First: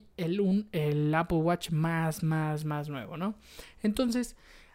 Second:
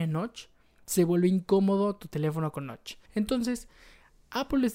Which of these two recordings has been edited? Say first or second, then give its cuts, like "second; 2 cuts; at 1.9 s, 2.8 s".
second; 1 cut; at 3.1 s